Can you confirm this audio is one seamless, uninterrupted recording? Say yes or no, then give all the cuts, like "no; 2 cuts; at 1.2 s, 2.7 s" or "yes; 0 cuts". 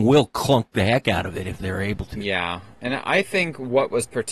yes; 0 cuts